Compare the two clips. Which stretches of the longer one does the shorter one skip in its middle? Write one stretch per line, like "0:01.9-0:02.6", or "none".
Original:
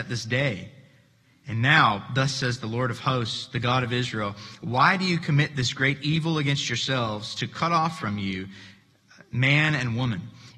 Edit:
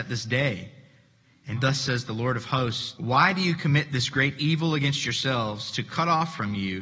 0:01.5-0:02.1
0:03.5-0:04.6